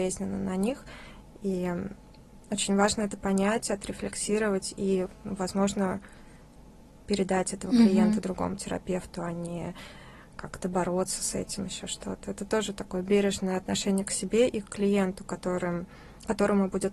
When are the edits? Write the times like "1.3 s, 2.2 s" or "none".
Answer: none